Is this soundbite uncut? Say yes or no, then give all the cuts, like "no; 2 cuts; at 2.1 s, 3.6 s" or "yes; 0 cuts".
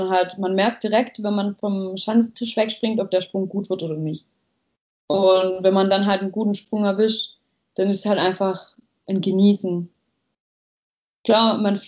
yes; 0 cuts